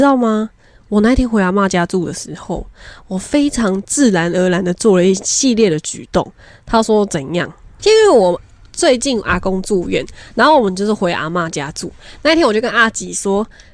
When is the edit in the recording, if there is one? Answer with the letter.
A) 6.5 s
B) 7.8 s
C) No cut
B